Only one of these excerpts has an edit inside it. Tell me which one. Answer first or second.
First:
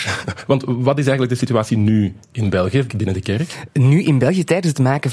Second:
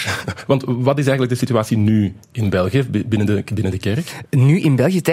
first